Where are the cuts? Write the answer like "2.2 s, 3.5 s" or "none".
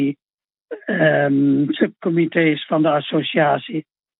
none